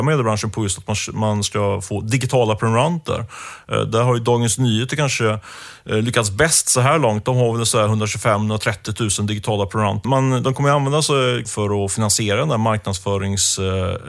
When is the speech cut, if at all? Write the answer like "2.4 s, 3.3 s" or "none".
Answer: 10.0 s, 11.4 s

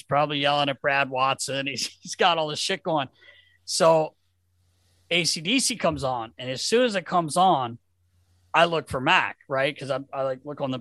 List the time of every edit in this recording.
none

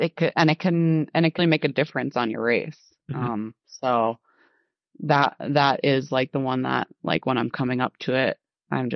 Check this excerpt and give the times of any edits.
1.4 s

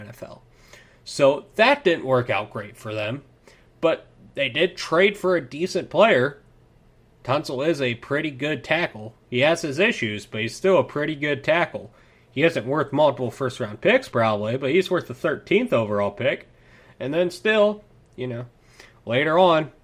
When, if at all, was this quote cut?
none

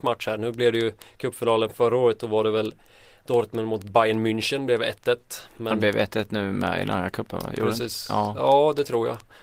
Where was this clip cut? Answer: none

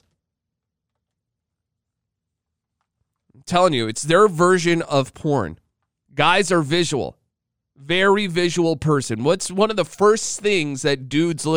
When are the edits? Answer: 6.1 s

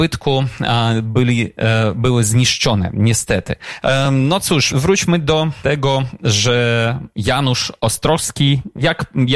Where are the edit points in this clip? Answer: none

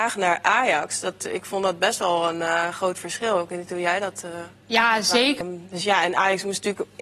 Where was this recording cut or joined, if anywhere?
5.4 s

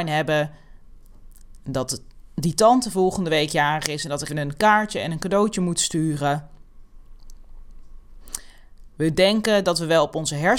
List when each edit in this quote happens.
4.3 s, 8.9 s

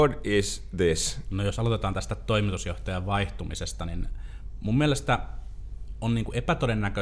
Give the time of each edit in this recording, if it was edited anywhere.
1.3 s

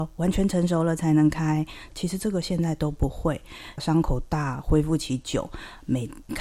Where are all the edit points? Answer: 1.9 s, 3.8 s

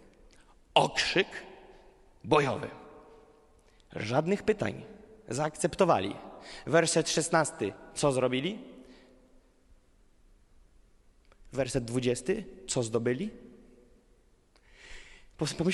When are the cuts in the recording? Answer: none

